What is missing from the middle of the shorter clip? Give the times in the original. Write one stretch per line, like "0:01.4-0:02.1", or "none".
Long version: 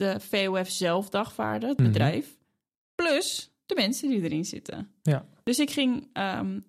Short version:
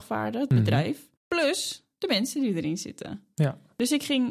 0:02.4-0:02.8